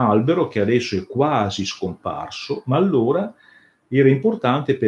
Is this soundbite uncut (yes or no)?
yes